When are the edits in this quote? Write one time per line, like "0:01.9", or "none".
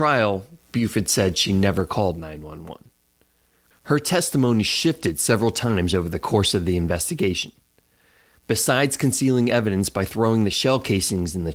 0:03.7